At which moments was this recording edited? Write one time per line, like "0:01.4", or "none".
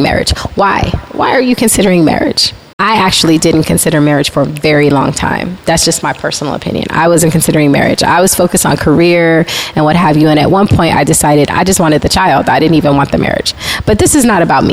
0:02.7